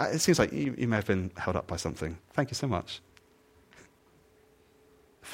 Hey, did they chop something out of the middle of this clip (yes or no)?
yes